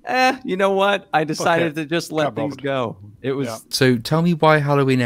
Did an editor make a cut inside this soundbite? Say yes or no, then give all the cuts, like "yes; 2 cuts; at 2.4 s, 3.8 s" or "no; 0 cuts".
yes; 1 cut; at 3.7 s